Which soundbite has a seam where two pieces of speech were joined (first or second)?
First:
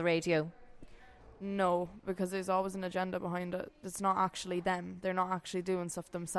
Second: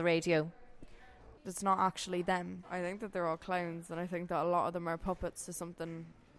second